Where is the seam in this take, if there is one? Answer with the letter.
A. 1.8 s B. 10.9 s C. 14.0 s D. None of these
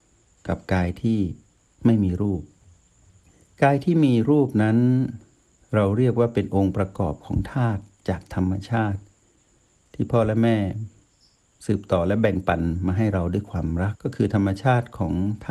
C